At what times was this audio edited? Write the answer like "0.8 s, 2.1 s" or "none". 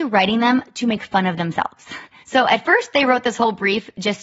none